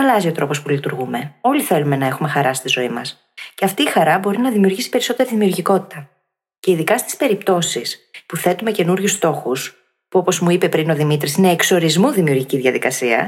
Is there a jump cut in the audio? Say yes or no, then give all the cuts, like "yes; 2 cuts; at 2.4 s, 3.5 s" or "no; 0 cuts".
no; 0 cuts